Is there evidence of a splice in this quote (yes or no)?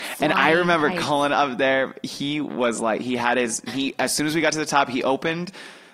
yes